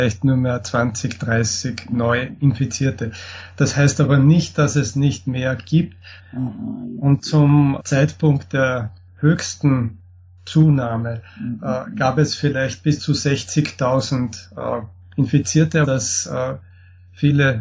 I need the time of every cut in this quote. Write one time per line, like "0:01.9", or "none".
0:06.2
0:07.8
0:15.8

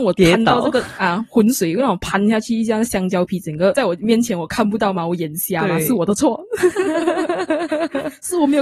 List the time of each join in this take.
none

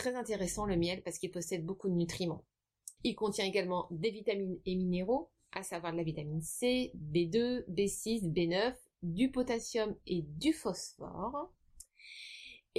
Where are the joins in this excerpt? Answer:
0:03.0

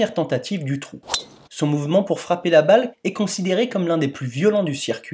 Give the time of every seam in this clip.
0:01.5
0:02.9

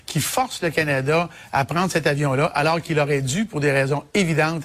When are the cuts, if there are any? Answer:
none

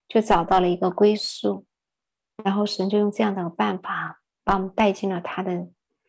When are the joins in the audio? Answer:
0:02.3

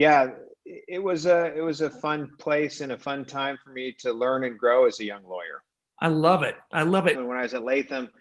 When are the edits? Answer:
0:07.1

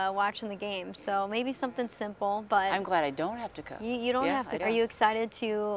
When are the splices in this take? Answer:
0:04.6

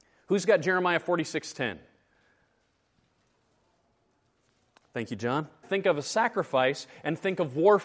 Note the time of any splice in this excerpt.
0:05.6

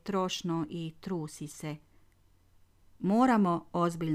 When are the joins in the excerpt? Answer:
0:02.9

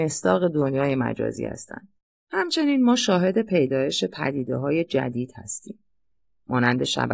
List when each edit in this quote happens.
none

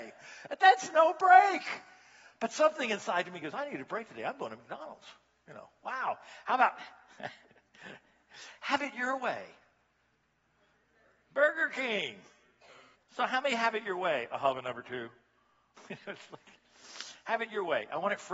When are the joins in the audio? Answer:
0:12.9

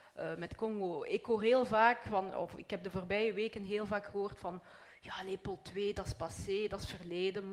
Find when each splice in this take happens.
none

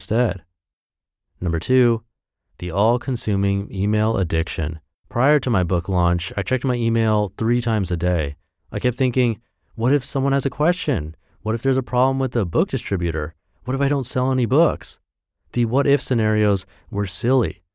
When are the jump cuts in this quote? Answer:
0:05.0
0:08.6

